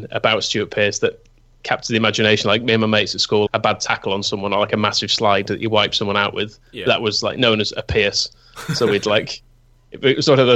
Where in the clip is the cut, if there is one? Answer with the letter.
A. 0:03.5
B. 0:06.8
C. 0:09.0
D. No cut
A